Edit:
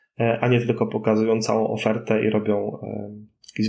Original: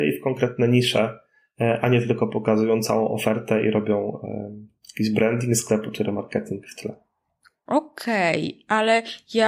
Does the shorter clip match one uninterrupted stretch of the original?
yes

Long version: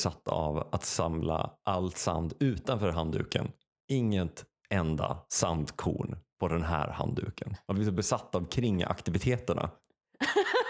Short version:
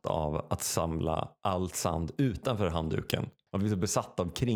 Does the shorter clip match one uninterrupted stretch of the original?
no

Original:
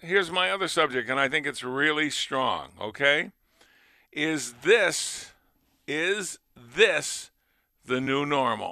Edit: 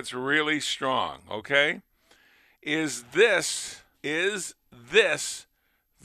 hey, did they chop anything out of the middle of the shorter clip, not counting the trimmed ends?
yes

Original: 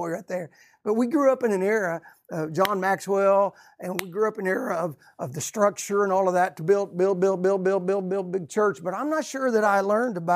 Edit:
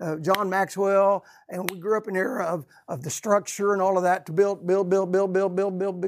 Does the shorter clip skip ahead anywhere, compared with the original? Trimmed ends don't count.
no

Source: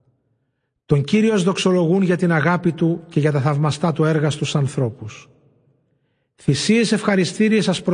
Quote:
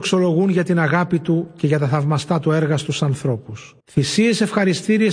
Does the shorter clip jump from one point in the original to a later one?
yes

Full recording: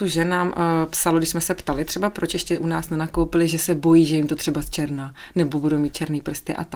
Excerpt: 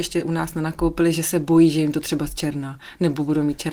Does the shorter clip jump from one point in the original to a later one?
no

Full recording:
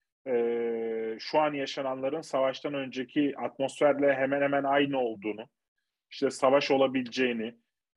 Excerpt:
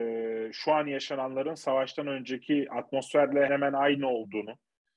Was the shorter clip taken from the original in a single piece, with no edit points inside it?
no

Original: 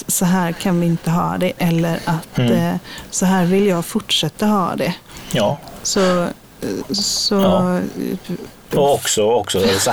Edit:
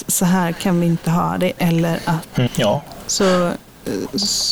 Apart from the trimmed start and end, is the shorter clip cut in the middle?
yes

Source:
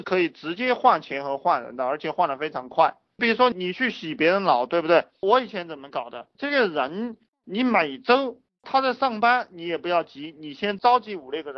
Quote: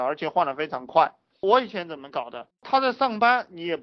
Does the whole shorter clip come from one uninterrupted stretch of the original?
no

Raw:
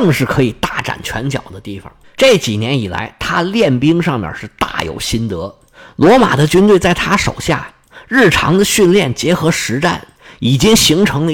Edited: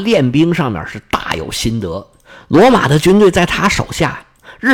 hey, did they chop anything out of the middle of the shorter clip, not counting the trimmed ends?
no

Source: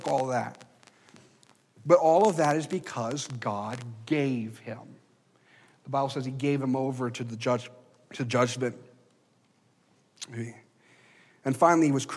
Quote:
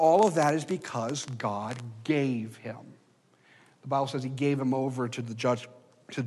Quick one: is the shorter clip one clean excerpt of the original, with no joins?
yes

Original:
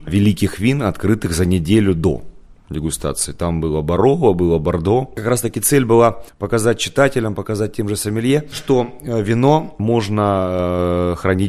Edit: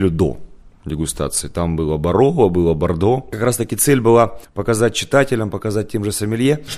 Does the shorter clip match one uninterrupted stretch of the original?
yes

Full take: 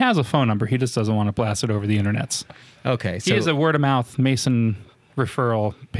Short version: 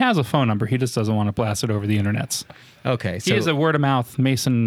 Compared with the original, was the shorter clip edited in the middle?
no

